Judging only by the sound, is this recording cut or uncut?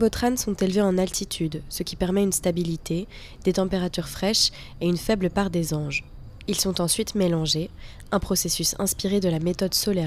uncut